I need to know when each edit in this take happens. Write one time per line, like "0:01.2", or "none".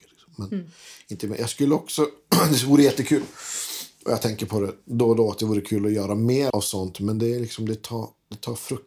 0:06.5